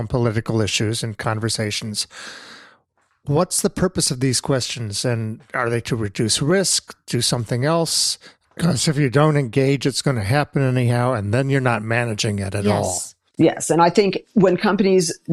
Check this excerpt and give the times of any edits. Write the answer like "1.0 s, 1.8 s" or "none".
8.6 s